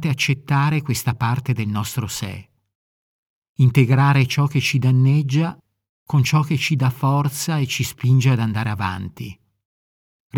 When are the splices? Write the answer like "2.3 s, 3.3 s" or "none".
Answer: none